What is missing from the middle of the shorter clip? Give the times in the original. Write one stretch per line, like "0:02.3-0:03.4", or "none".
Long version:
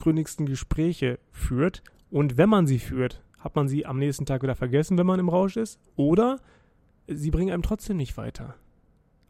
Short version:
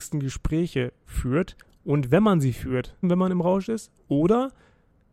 0:03.3-0:04.9